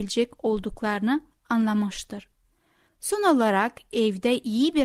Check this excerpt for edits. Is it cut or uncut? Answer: uncut